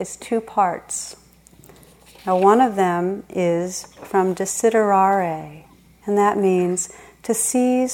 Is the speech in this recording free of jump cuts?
yes; 0 cuts

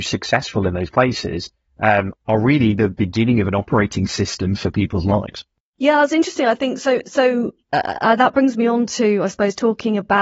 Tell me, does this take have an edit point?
yes; 1 cut; at 2.1 s

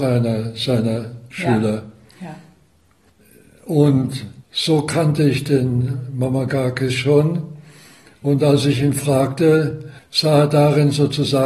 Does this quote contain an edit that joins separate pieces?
yes; 2 cuts; at 4.4 s, 10.0 s

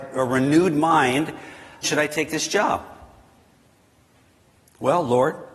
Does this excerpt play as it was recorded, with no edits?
no; 1 cut; at 1.8 s

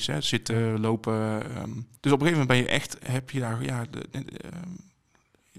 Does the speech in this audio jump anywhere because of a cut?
yes; 1 cut; at 2.0 s

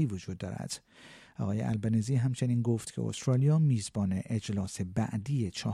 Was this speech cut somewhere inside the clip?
no; 0 cuts

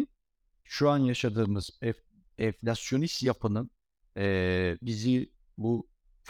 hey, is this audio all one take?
yes; 0 cuts

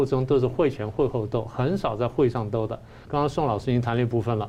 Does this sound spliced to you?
yes; 1 cut; at 3.0 s

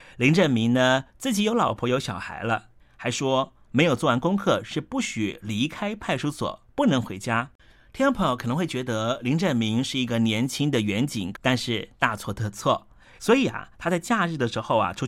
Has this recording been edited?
yes; 3 cuts; at 2.8 s, 11.3 s, 13.2 s

